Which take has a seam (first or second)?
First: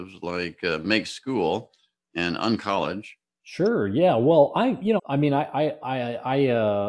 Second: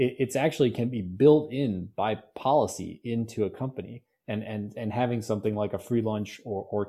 first